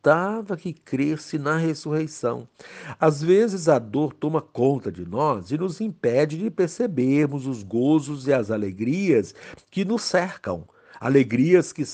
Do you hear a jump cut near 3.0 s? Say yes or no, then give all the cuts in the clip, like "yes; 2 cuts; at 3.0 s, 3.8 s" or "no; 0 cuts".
no; 0 cuts